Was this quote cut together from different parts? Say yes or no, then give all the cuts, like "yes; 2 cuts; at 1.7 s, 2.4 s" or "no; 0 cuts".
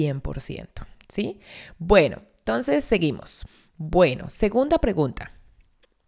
no; 0 cuts